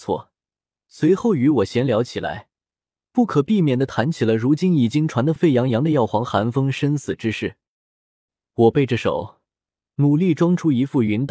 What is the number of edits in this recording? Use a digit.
2